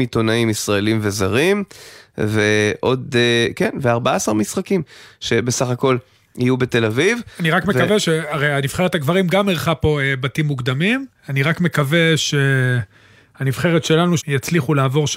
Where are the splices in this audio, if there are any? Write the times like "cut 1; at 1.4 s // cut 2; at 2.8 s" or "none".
cut 1; at 11.2 s // cut 2; at 14.2 s